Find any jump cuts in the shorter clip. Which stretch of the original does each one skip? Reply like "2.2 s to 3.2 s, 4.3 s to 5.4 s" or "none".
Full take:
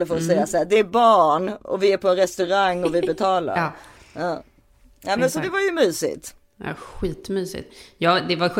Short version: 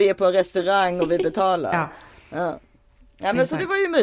none